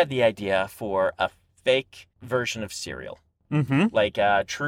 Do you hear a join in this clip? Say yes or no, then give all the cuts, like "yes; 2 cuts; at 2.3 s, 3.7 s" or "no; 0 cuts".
yes; 1 cut; at 2.1 s